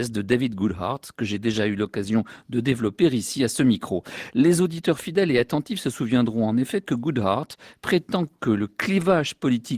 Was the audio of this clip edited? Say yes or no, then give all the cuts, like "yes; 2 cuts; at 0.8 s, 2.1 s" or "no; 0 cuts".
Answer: no; 0 cuts